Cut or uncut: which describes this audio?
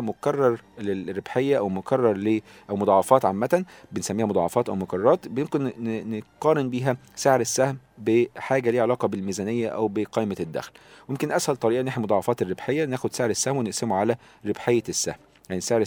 uncut